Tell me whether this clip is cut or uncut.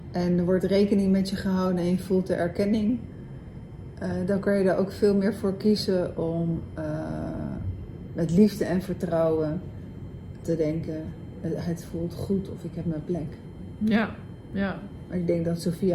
cut